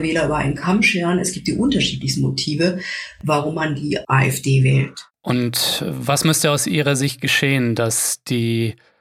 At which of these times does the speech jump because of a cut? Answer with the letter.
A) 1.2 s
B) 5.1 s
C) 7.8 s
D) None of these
D